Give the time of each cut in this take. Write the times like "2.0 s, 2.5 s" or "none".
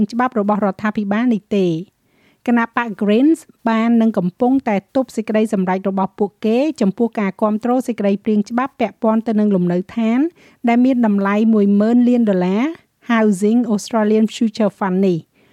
none